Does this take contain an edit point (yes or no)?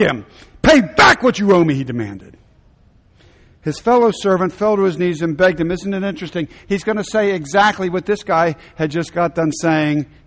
no